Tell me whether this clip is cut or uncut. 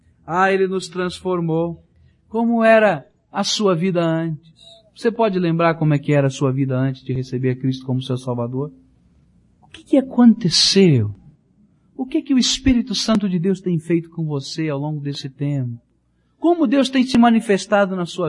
uncut